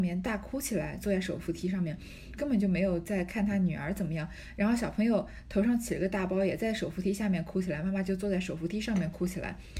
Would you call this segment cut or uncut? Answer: cut